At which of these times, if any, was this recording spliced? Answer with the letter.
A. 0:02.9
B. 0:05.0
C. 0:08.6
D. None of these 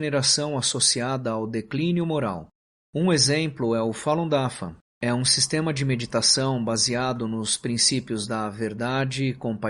B